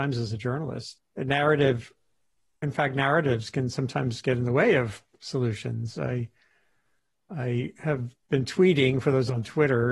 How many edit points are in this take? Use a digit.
2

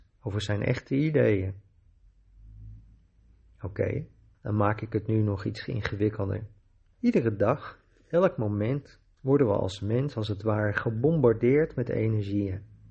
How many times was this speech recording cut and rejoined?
2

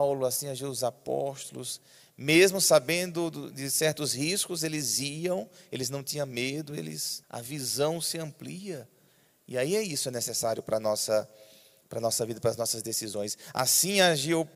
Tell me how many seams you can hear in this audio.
1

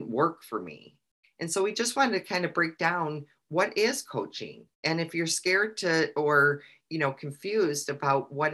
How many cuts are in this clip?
2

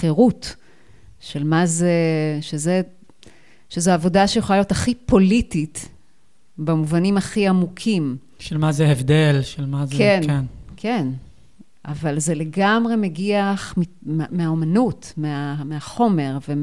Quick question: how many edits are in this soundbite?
1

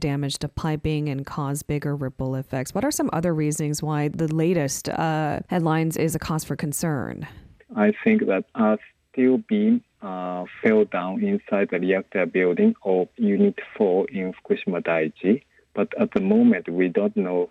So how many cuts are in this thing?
0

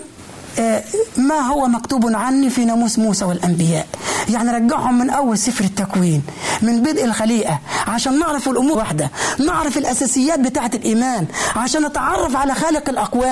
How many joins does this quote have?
1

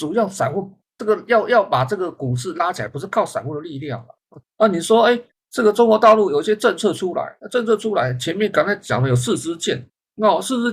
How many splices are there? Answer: 1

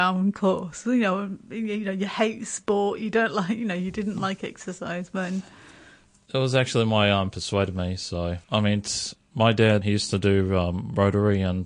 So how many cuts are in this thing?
3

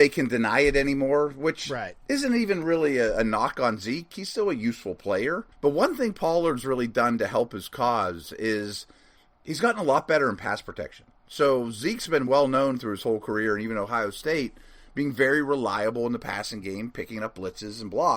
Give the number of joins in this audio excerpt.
1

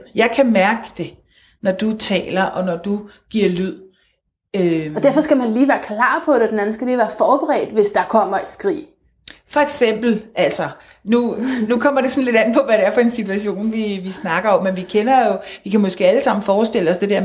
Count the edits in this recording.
0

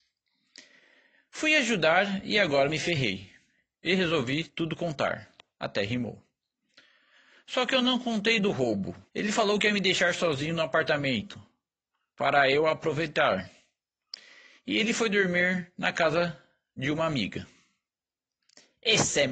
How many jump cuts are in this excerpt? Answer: 2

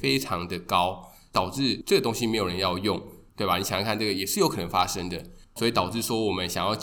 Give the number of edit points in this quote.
2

